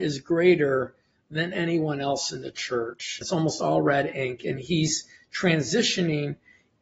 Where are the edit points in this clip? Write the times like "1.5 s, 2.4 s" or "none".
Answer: 3.2 s